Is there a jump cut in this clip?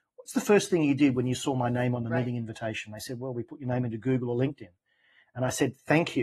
no; 0 cuts

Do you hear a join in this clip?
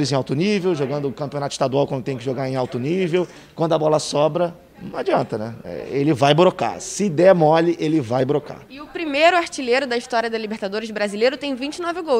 no; 0 cuts

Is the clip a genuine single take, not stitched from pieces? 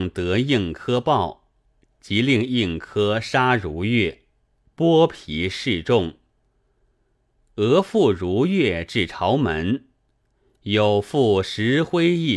yes; 0 cuts

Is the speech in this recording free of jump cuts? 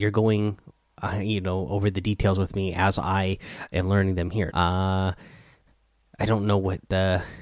no; 1 cut; at 4.5 s

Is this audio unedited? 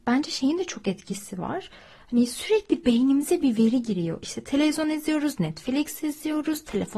yes; 0 cuts

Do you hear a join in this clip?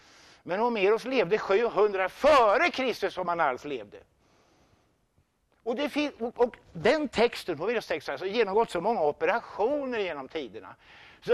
no; 0 cuts

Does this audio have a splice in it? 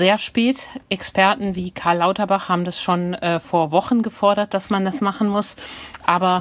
no; 0 cuts

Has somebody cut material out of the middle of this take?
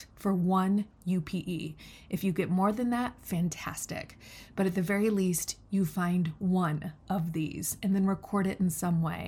no; 0 cuts

